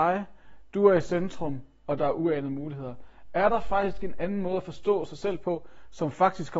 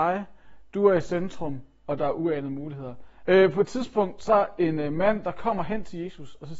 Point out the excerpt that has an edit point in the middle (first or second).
second